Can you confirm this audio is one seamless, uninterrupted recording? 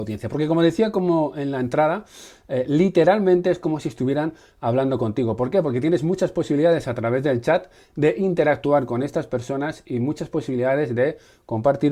yes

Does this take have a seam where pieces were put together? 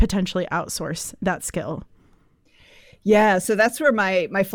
no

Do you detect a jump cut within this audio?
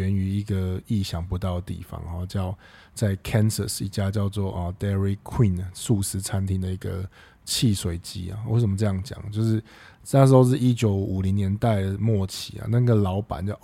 no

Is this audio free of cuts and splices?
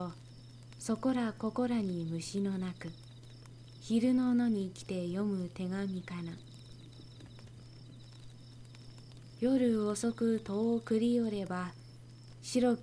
yes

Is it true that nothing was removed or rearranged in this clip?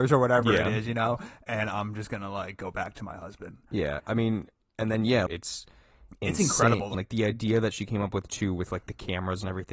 no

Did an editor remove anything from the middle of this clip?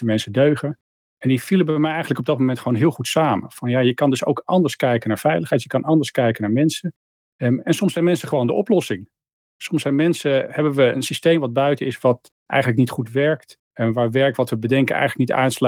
no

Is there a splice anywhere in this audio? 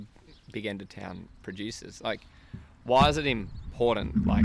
no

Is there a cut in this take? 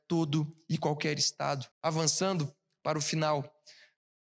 yes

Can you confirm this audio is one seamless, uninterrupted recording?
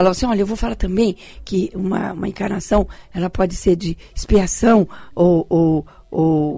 yes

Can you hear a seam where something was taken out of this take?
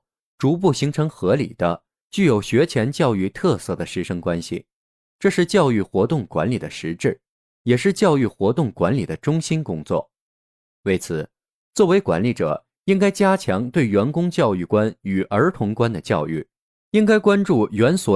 no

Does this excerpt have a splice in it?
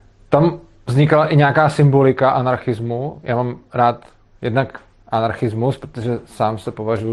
no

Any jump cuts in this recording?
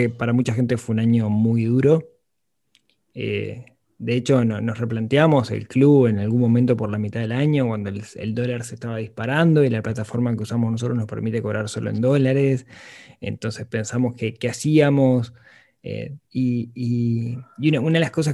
yes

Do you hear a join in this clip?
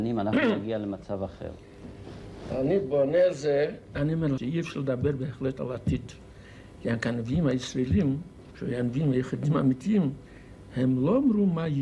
yes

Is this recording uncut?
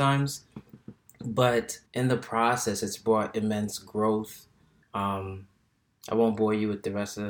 no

